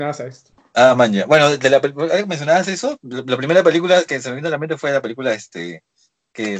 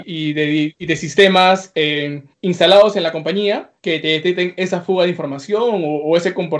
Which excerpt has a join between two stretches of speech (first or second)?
second